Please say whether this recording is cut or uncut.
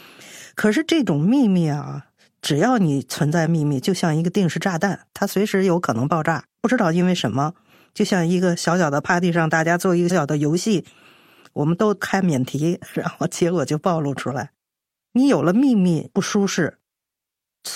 cut